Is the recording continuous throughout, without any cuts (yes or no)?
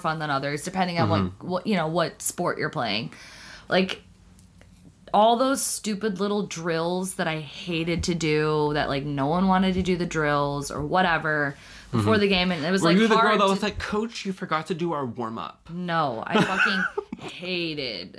no